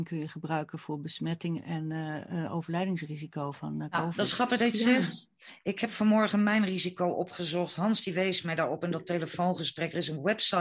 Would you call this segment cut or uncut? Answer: uncut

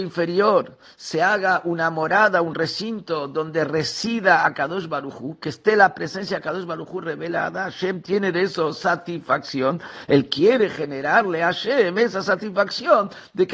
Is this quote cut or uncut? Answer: uncut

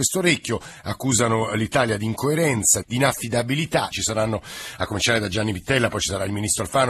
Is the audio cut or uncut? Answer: cut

